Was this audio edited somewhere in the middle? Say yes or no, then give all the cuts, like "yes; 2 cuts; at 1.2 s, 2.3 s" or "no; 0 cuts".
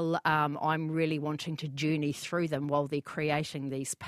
no; 0 cuts